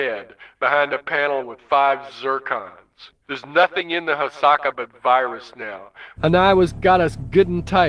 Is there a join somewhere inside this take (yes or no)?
yes